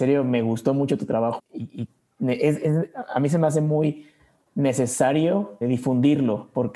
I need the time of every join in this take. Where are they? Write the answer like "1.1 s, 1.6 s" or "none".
1.4 s, 5.6 s